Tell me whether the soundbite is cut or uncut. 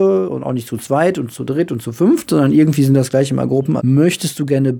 cut